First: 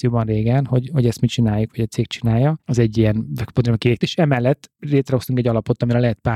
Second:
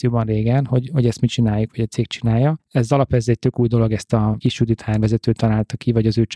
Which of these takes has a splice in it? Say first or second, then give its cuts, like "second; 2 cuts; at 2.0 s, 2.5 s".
first; 2 cuts; at 2.6 s, 4.0 s